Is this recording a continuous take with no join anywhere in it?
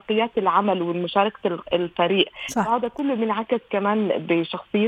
yes; 0 cuts

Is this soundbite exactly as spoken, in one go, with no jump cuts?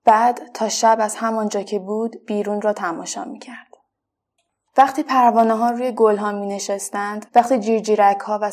no; 1 cut; at 7.3 s

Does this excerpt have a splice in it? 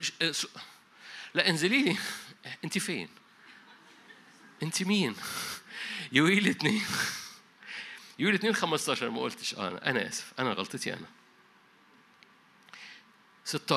no; 0 cuts

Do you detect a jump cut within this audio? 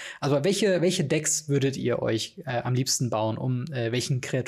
no; 0 cuts

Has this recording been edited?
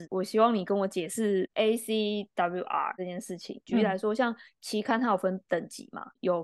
yes; 1 cut; at 3.7 s

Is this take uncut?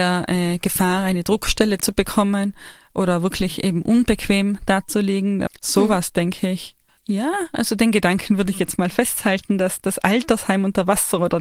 no; 2 cuts; at 5.5 s, 6.9 s

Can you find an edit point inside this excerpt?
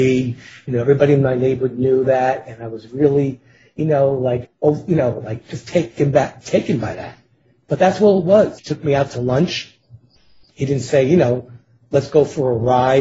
yes; 2 cuts; at 4.4 s, 8.6 s

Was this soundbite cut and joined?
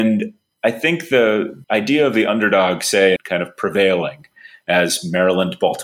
yes; 2 cuts; at 1.6 s, 3.2 s

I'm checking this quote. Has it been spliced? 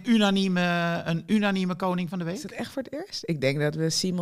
no; 0 cuts

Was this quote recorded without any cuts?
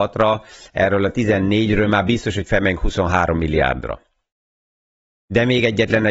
yes; 0 cuts

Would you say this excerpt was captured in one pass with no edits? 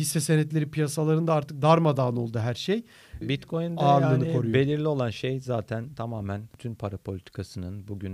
no; 1 cut; at 3.2 s

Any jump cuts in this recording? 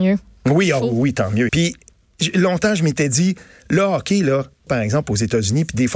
yes; 2 cuts; at 1.5 s, 4.7 s

